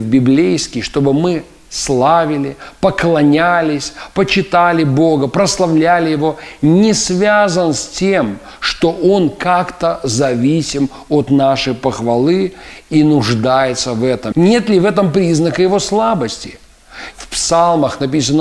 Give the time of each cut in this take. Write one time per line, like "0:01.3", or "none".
0:14.3
0:17.1